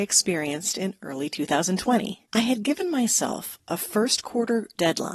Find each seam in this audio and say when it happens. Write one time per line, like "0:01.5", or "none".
0:02.2